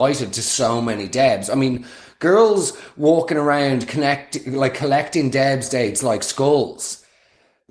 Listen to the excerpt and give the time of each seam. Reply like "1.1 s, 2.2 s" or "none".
none

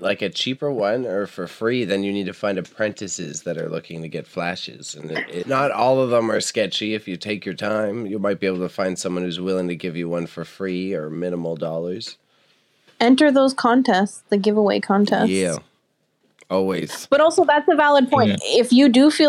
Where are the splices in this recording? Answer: 5.4 s

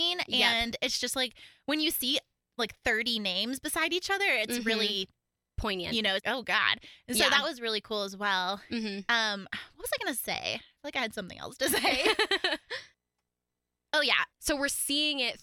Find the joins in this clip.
6.2 s, 14.3 s

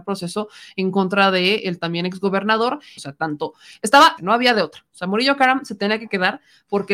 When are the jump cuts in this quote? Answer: 3.0 s, 4.2 s

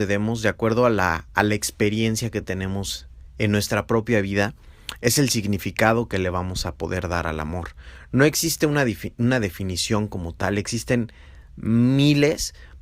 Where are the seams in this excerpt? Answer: none

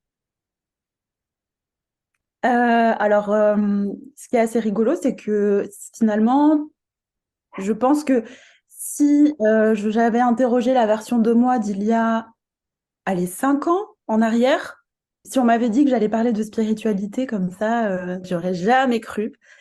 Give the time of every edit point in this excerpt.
15.2 s, 18.2 s

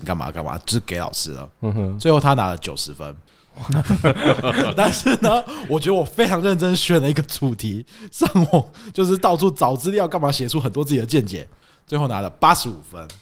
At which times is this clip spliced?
none

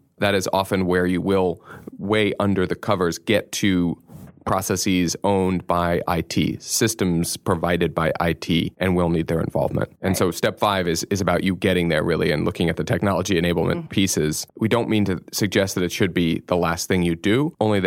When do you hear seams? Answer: none

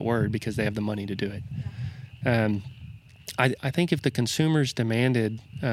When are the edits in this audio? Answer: 2.2 s, 3.6 s

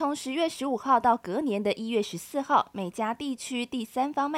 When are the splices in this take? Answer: none

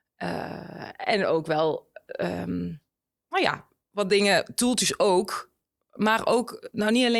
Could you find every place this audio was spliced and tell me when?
none

